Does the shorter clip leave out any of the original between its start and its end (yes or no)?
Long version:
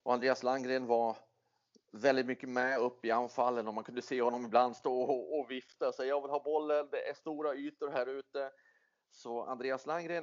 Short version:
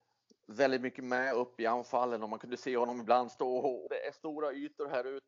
yes